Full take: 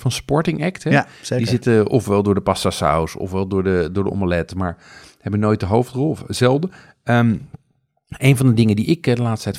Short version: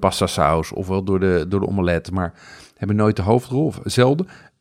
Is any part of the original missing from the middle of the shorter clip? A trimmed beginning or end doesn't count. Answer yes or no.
no